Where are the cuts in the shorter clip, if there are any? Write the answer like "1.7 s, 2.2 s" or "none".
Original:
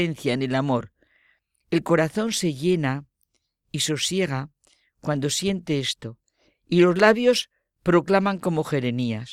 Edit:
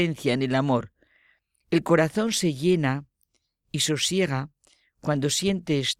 none